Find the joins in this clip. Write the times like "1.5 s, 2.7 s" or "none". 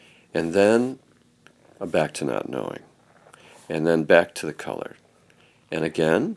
none